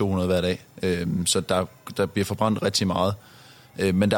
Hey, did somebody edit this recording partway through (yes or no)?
no